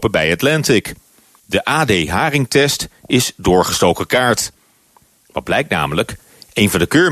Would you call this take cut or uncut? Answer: cut